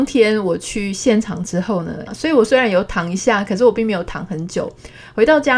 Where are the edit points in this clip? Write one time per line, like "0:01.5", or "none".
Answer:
0:02.1